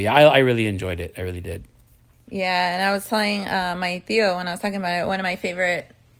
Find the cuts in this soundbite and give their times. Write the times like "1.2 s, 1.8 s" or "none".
none